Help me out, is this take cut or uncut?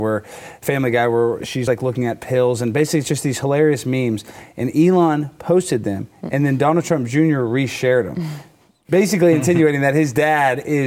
uncut